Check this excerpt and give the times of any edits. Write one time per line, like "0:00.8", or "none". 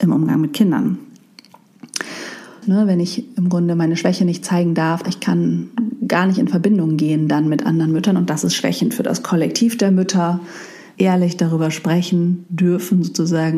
0:02.6
0:05.0
0:11.0